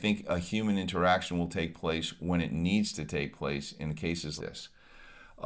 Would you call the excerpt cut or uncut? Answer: cut